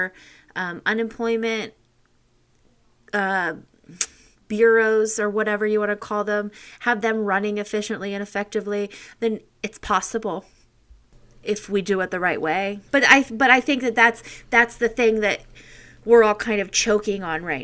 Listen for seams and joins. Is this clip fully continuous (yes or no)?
no